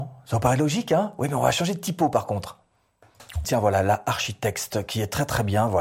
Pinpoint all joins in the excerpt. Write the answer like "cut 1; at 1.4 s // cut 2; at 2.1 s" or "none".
cut 1; at 3.4 s